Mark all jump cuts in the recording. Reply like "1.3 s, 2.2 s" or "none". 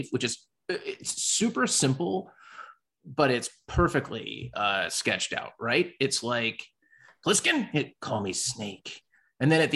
none